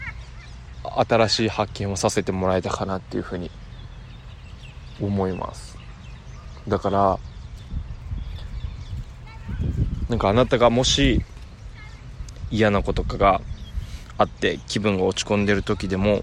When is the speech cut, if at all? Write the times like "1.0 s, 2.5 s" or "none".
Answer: 12.9 s